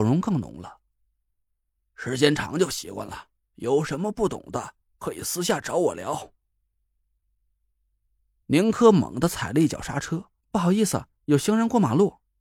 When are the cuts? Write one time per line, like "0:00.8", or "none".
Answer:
0:10.4